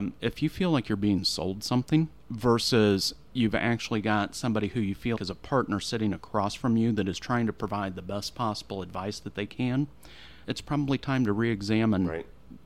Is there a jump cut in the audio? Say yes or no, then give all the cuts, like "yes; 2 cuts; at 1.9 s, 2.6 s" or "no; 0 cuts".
yes; 3 cuts; at 2.2 s, 5.2 s, 10.4 s